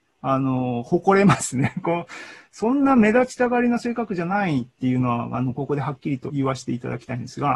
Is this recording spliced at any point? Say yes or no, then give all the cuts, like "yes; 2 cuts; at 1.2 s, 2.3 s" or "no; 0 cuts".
yes; 1 cut; at 6.3 s